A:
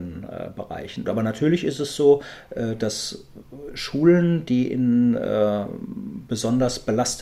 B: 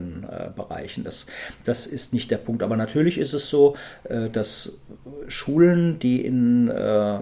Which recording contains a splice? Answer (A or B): A